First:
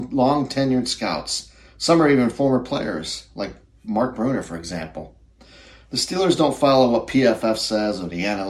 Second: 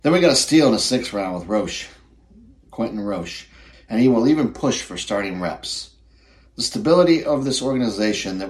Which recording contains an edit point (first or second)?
second